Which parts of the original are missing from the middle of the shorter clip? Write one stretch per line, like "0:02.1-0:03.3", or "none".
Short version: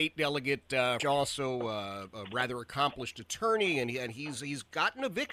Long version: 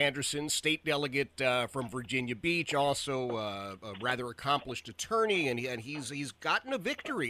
0:01.7-0:02.7